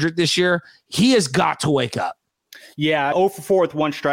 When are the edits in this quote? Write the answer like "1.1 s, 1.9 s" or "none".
3.1 s